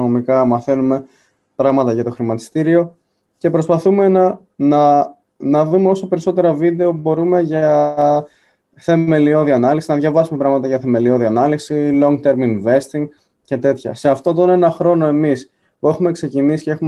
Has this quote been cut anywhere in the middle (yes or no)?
no